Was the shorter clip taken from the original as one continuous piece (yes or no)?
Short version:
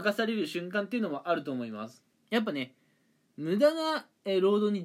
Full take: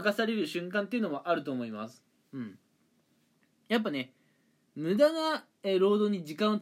no